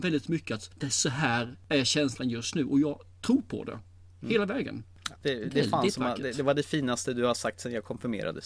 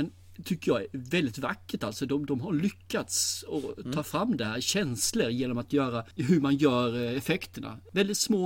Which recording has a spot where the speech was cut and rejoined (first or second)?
first